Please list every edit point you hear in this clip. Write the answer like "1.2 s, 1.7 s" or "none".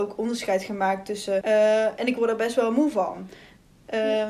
1.4 s